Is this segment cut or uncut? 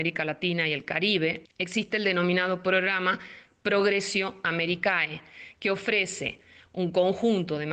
cut